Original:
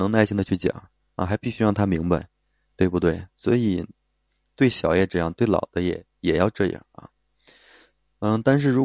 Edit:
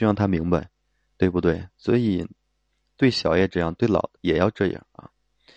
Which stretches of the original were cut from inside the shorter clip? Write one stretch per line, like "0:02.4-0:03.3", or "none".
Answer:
0:05.7-0:06.1